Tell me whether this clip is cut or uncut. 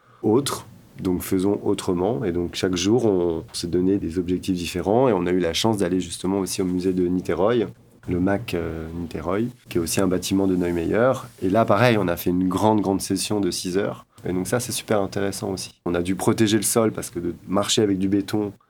cut